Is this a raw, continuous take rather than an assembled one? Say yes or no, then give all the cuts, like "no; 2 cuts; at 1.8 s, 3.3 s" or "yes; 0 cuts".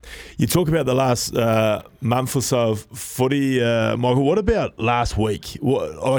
yes; 0 cuts